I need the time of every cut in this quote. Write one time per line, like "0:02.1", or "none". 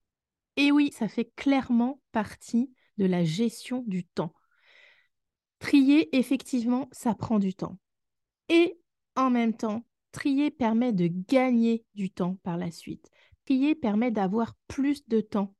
0:00.9